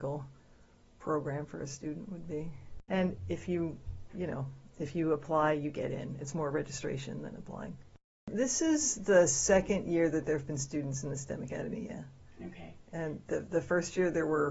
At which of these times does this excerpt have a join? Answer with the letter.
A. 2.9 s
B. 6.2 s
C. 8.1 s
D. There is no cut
A